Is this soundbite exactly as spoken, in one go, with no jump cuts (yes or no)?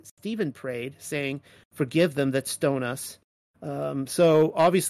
yes